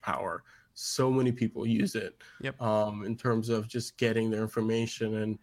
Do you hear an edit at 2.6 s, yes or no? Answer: no